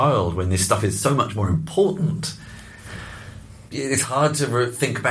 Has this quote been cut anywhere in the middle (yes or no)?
yes